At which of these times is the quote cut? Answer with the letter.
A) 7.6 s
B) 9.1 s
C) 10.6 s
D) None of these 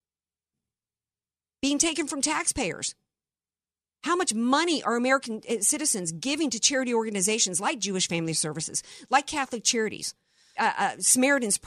C